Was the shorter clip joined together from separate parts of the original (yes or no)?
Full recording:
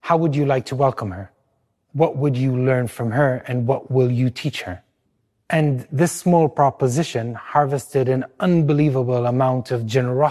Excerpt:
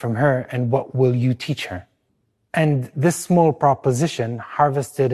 no